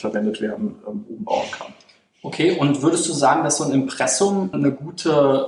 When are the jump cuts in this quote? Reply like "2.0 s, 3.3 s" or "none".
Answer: 4.5 s